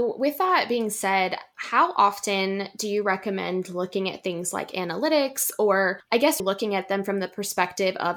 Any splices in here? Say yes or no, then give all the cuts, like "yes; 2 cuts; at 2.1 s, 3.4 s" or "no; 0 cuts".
yes; 1 cut; at 6.4 s